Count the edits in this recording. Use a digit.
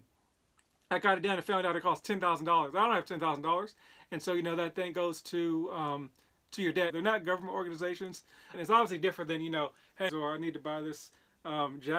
3